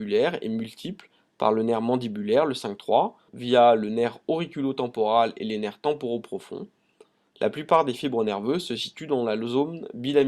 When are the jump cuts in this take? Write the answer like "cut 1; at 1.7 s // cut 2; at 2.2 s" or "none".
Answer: cut 1; at 3.3 s